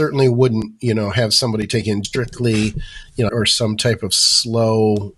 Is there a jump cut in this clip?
yes; 2 cuts; at 2.0 s, 3.3 s

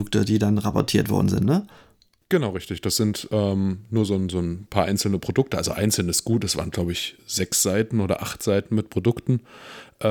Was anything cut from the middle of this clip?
no; 0 cuts

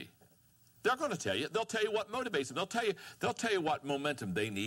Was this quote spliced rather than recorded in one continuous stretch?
no; 0 cuts

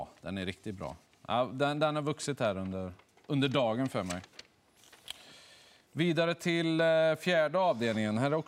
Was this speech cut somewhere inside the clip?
no; 0 cuts

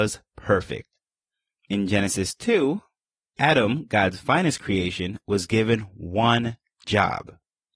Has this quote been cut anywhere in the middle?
no; 0 cuts

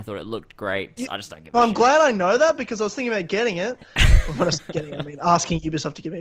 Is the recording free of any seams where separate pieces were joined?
no; 1 cut; at 1.0 s

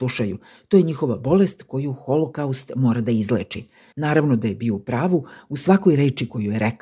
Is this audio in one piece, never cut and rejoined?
no; 1 cut; at 3.9 s

